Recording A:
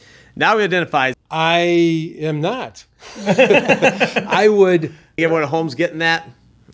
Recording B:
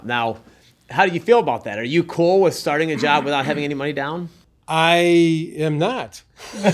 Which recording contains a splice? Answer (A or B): A